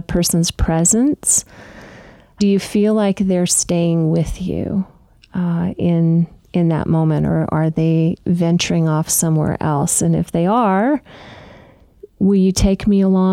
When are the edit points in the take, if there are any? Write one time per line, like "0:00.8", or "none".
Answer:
none

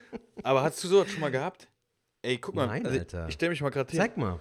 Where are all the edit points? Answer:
none

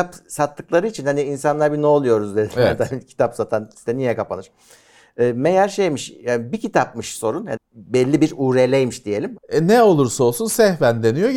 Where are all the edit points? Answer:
0:07.6
0:09.4

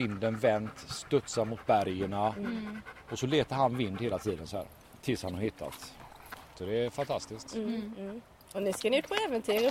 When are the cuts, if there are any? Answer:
0:06.5

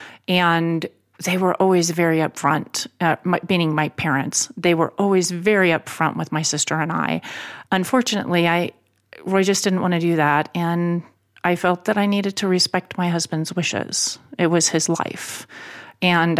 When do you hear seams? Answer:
0:07.7

